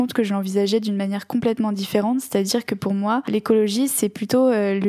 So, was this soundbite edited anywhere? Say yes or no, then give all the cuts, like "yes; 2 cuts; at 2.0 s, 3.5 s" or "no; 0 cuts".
no; 0 cuts